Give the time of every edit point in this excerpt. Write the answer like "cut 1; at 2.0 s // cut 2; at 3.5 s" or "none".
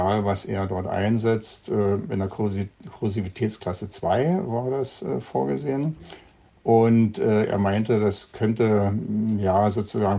none